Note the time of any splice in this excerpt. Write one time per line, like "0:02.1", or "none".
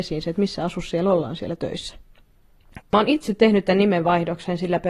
0:02.8